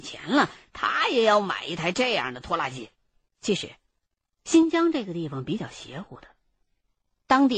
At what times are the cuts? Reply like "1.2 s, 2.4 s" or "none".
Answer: 3.3 s